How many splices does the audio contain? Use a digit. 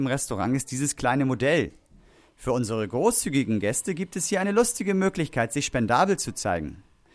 0